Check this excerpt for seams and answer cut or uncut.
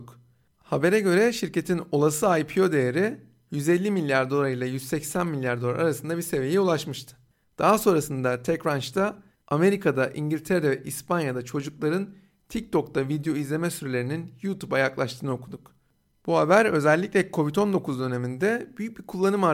uncut